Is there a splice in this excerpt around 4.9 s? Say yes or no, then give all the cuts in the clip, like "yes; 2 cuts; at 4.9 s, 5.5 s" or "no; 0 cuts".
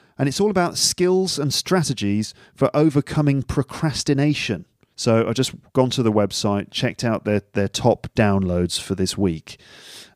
yes; 1 cut; at 4.9 s